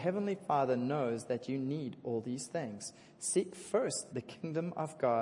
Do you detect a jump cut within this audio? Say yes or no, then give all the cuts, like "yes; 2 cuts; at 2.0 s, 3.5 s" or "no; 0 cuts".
yes; 1 cut; at 4.1 s